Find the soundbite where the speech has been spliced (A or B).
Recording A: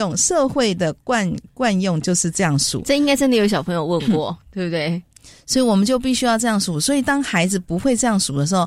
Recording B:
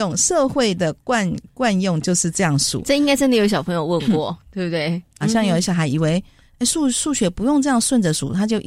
B